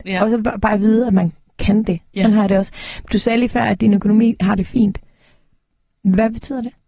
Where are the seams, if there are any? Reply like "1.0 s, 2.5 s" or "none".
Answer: none